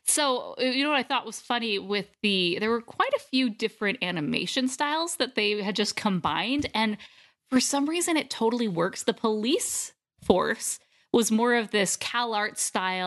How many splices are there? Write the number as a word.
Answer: zero